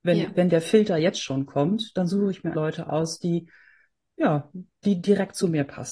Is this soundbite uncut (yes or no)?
no